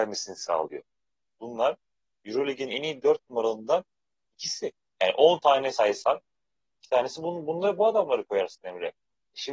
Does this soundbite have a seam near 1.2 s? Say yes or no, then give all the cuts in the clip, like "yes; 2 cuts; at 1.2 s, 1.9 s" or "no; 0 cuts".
yes; 1 cut; at 1.2 s